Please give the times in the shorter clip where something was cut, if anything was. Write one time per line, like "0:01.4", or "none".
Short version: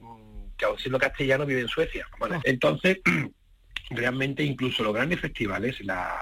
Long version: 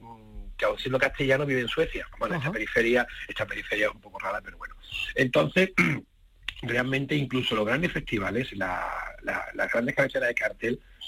0:02.4